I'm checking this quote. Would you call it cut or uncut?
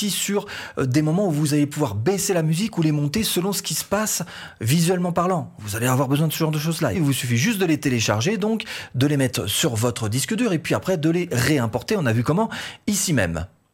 cut